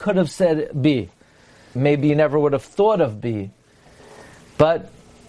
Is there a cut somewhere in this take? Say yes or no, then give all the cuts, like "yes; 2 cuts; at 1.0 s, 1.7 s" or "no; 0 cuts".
yes; 1 cut; at 1.8 s